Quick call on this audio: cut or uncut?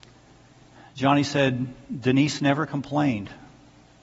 uncut